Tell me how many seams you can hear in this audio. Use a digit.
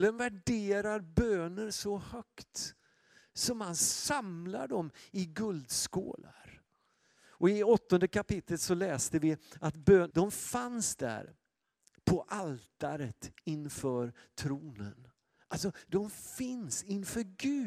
1